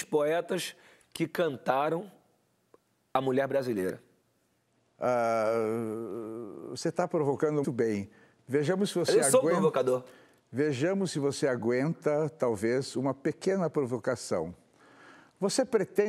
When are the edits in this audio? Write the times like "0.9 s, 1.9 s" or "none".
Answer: 7.6 s

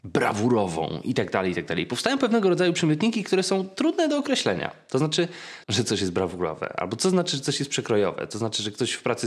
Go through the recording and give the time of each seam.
5.6 s

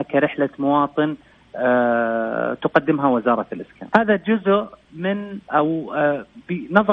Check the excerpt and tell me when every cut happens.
3.9 s, 5.4 s

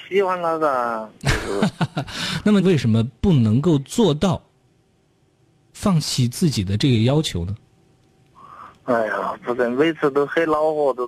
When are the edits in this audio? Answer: 2.6 s, 9.4 s

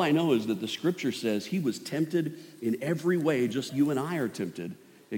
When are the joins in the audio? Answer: 3.7 s

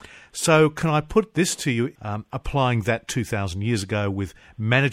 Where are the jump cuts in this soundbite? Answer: 2.0 s

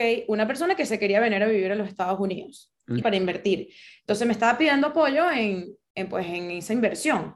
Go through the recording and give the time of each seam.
3.0 s

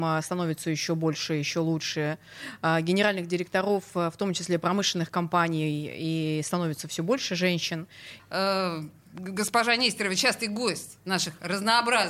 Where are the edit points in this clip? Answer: 8.2 s

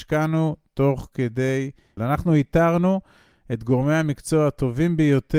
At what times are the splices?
2.0 s

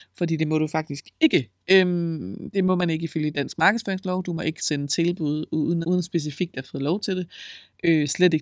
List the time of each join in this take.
4.6 s, 5.8 s

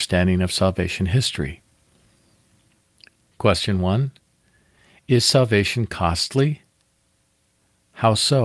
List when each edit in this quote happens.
3.3 s

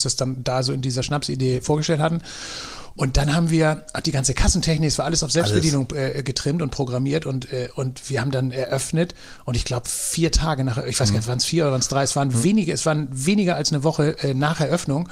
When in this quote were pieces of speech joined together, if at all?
none

